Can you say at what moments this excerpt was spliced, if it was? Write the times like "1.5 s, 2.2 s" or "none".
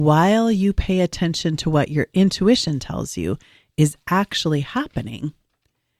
none